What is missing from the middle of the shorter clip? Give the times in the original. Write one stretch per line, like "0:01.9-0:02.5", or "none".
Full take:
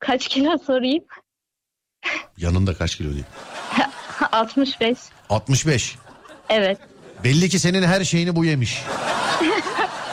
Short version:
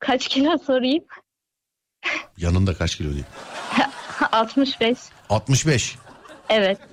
none